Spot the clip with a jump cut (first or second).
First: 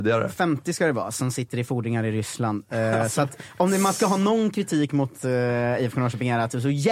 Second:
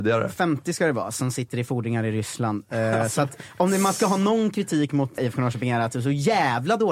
second